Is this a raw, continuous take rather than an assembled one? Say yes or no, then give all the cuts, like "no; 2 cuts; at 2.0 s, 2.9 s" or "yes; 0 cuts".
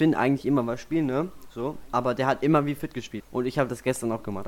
no; 1 cut; at 3.2 s